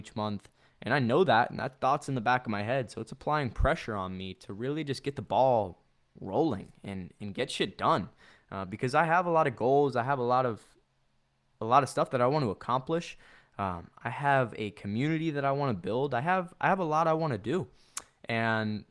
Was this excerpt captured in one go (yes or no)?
yes